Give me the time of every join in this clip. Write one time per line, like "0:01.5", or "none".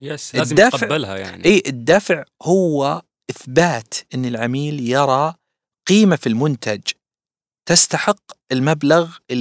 0:08.4